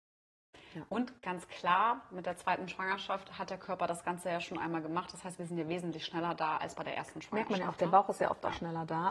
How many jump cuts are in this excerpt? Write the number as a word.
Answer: zero